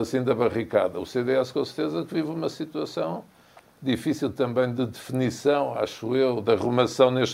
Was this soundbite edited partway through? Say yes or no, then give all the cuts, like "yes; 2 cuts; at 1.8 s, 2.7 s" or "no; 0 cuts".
no; 0 cuts